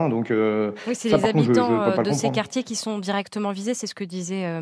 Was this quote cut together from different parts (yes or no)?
no